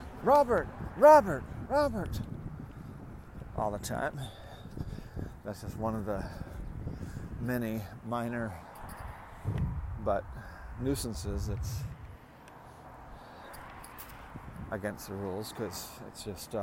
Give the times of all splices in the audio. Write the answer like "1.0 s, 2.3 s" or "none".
1.7 s